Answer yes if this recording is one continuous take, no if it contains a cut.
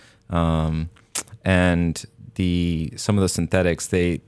yes